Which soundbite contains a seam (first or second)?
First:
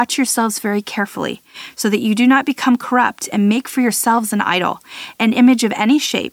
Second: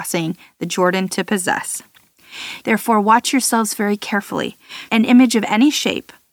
second